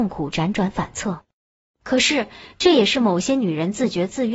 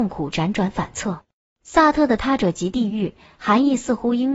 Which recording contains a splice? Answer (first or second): second